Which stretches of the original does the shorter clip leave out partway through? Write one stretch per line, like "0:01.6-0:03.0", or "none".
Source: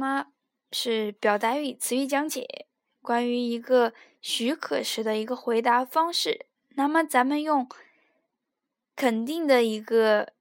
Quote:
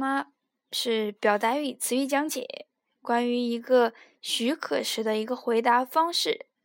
none